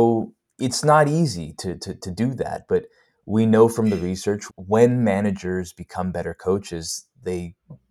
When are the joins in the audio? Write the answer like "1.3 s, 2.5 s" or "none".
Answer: 4.5 s